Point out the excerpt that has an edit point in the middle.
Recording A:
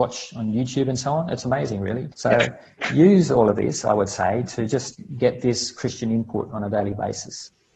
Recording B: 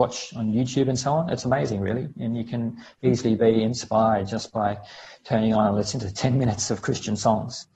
A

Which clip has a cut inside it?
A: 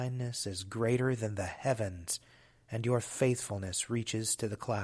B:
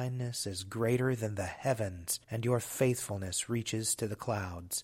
B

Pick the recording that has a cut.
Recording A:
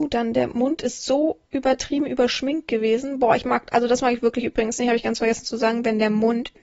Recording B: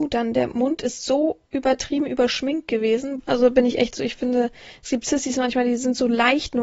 B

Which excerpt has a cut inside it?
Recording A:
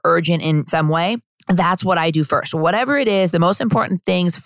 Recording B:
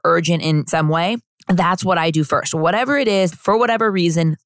B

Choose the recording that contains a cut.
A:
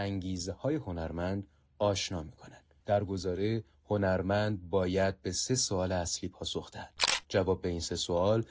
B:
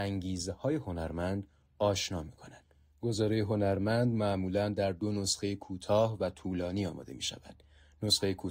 A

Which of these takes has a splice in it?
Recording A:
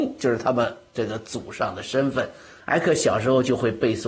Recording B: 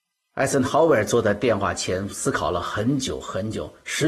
A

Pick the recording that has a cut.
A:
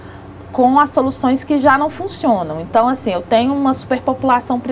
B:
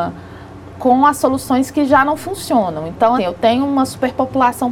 B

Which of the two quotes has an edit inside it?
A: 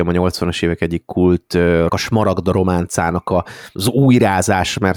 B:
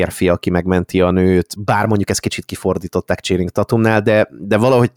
A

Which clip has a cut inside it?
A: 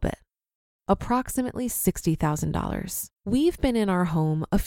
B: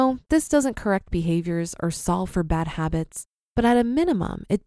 A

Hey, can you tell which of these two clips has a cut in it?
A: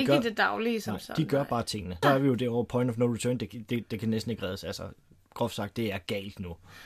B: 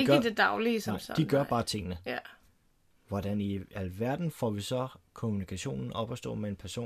A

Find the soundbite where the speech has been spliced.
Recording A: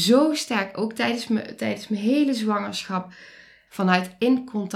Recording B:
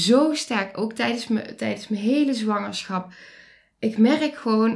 A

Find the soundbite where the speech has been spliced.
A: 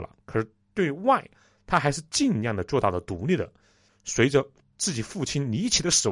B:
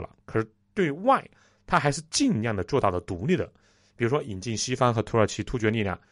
A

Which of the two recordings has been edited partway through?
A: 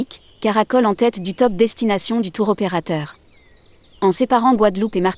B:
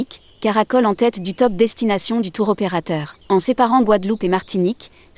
B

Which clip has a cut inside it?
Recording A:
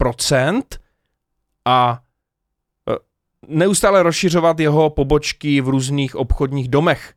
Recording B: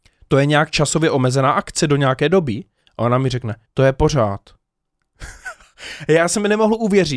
B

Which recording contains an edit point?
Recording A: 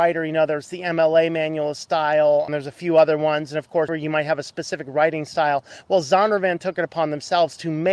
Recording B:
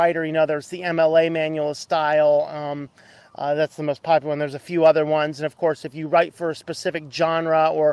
A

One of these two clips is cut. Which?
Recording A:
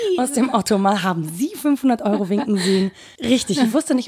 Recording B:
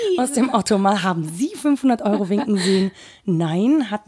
A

